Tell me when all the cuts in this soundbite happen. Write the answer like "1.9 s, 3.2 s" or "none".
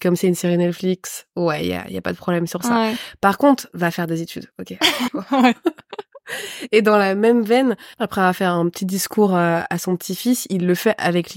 5.1 s